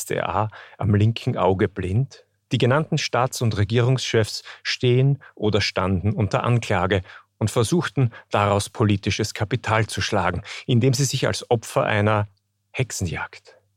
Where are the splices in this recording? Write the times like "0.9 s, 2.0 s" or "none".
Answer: 2.5 s